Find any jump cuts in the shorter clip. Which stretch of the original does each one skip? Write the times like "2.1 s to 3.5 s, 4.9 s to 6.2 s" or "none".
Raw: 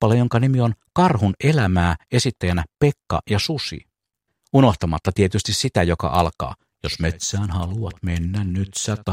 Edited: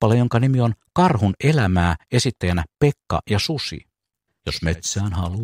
4.4 s to 6.8 s